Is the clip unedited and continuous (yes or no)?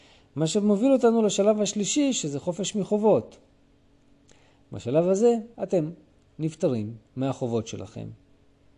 no